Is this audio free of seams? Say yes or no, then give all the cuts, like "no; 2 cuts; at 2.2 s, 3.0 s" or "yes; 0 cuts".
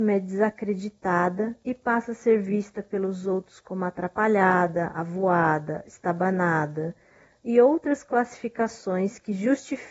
yes; 0 cuts